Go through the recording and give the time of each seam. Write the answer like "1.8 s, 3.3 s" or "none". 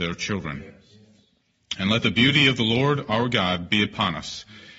none